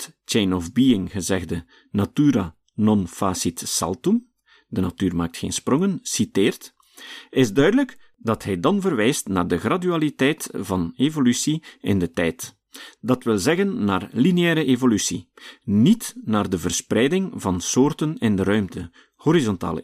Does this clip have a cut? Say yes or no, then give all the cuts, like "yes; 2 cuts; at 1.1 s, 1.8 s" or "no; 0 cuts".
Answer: no; 0 cuts